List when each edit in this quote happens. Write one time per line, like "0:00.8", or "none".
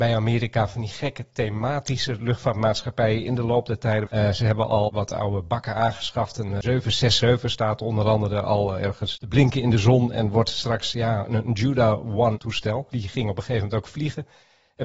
0:04.1
0:12.9